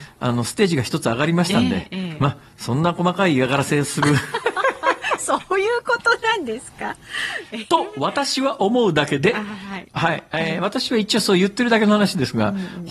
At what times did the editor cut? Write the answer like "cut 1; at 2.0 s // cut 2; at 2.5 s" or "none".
none